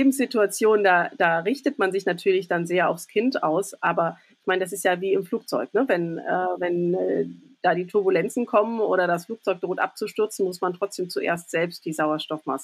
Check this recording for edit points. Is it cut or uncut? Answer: uncut